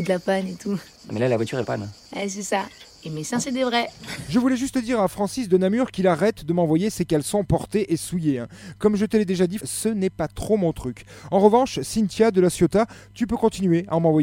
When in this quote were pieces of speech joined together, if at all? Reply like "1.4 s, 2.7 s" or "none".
1.6 s, 9.6 s